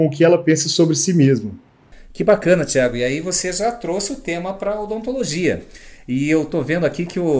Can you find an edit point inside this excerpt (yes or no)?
no